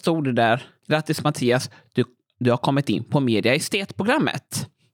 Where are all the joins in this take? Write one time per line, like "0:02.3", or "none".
none